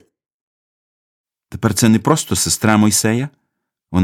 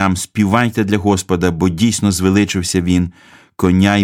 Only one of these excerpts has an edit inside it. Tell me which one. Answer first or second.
first